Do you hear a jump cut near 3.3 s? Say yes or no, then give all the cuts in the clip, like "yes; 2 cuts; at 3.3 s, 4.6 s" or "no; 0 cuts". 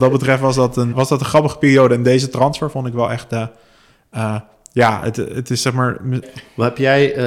no; 2 cuts; at 0.9 s, 6.2 s